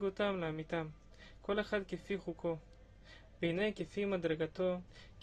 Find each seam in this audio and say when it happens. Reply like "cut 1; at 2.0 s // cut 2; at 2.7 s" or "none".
cut 1; at 3.4 s